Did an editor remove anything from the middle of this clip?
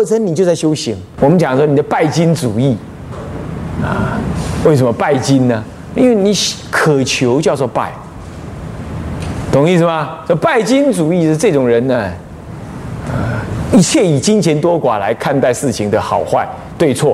yes; 1 cut; at 1.2 s

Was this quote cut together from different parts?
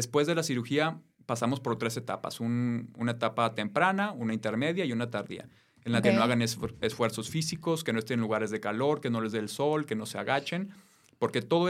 yes; 2 cuts; at 1.2 s, 6.0 s

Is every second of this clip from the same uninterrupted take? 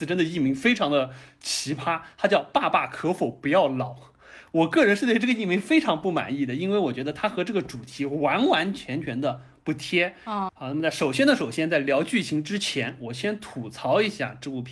no; 1 cut; at 10.5 s

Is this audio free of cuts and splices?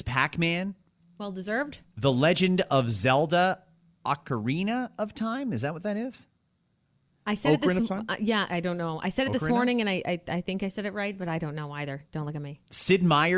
yes; 0 cuts

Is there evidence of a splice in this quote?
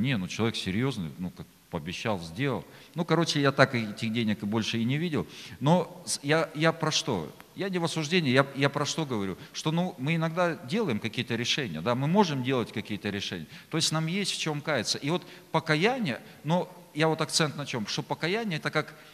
no; 0 cuts

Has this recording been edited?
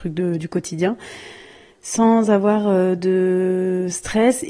no; 0 cuts

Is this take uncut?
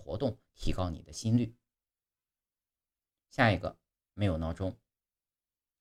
yes; 0 cuts

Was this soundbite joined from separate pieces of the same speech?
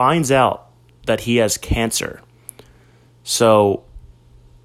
no; 0 cuts

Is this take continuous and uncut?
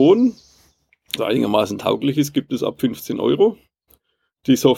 no; 1 cut; at 1.2 s

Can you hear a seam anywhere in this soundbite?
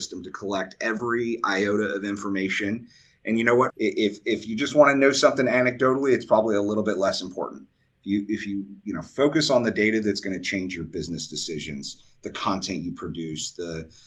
yes; 1 cut; at 3.7 s

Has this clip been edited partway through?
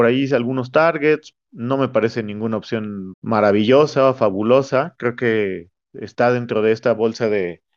yes; 1 cut; at 3.1 s

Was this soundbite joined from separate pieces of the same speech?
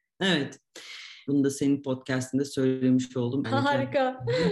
yes; 2 cuts; at 1.3 s, 3.4 s

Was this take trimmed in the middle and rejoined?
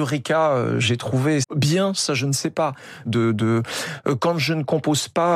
yes; 2 cuts; at 1.4 s, 3.1 s

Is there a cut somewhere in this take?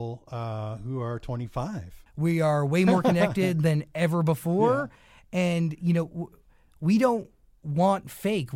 yes; 1 cut; at 2.1 s

